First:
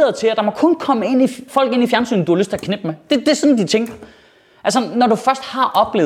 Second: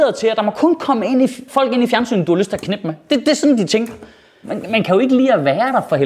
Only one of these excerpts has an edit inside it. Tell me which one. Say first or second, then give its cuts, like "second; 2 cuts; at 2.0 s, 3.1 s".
second; 1 cut; at 4.4 s